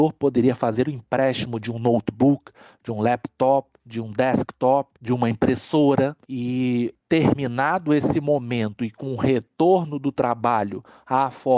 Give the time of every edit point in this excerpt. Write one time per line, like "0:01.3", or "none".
0:03.8